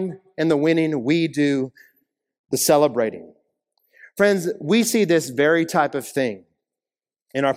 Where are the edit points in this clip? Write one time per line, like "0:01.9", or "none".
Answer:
none